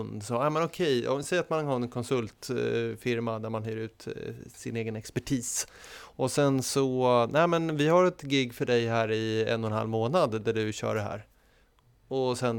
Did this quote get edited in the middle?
no; 0 cuts

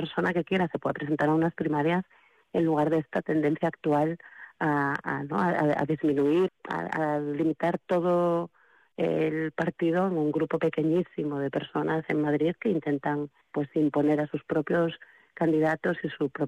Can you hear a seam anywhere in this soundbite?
yes; 2 cuts; at 6.5 s, 13.4 s

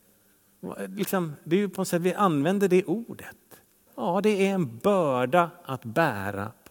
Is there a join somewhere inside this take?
yes; 1 cut; at 3.9 s

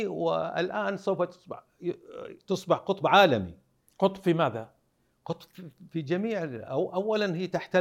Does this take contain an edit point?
no; 0 cuts

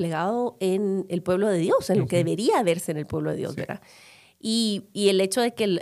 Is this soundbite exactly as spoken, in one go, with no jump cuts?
yes; 0 cuts

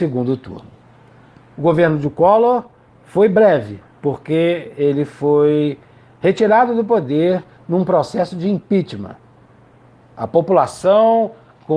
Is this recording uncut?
yes; 0 cuts

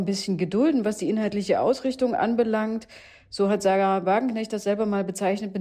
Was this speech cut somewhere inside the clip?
no; 0 cuts

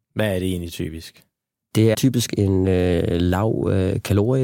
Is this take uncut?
no; 1 cut; at 1.9 s

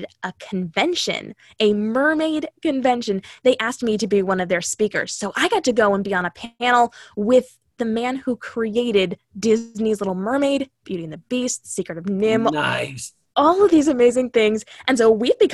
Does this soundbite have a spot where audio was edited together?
no; 0 cuts

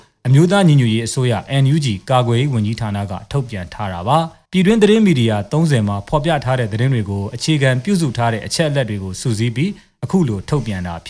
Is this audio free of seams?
no; 1 cut; at 4.4 s

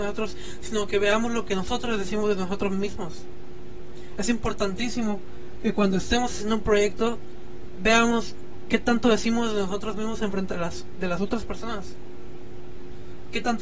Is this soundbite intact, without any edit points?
yes; 0 cuts

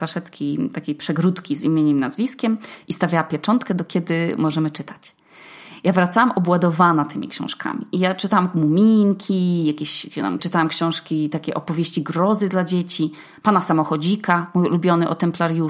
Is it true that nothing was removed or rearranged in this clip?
no; 1 cut; at 10.4 s

